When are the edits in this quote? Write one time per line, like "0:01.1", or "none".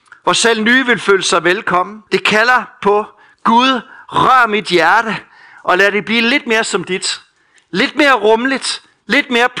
0:02.1